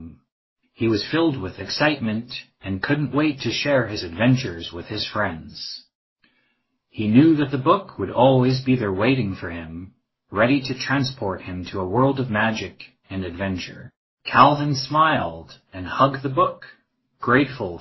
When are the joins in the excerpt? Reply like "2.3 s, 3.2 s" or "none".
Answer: none